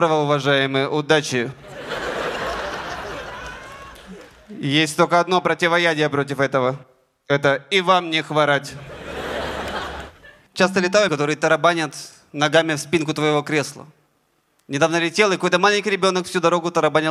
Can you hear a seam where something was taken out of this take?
yes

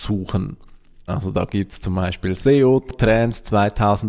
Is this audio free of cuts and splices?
no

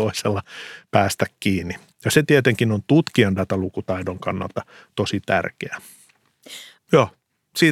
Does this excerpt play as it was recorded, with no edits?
no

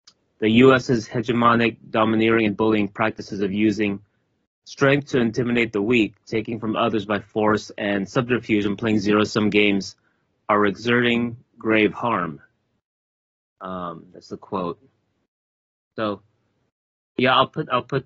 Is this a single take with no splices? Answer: yes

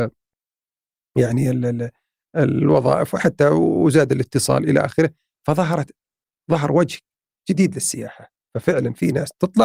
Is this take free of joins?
yes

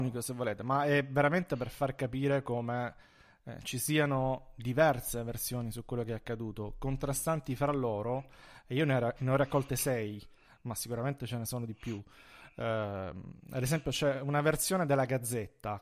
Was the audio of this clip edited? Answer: no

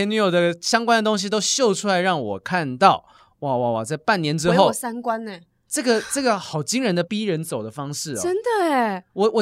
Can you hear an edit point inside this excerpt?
yes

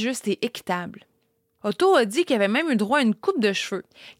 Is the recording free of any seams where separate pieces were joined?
yes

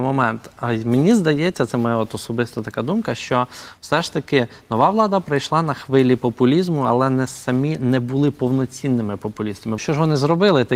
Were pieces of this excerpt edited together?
yes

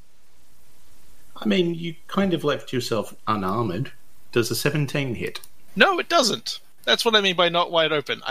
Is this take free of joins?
yes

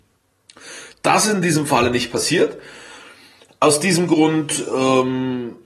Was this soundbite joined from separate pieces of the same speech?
yes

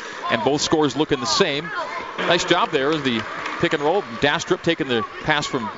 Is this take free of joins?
no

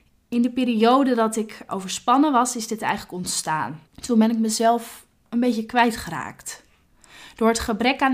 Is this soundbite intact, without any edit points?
no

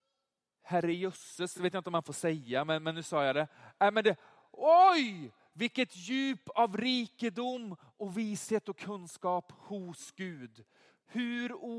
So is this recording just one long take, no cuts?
yes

